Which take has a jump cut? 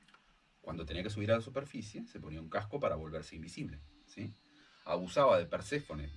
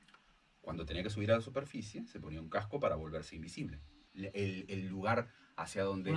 second; 1 cut; at 4.1 s

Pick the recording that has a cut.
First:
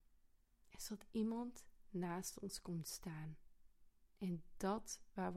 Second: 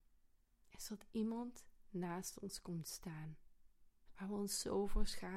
second; 1 cut; at 4.1 s

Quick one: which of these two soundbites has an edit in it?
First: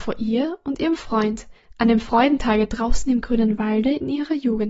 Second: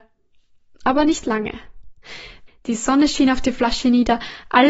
second; 1 cut; at 2.5 s

